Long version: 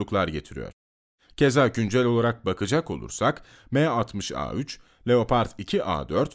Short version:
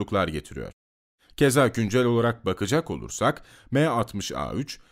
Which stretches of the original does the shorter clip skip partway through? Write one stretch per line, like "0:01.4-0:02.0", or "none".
none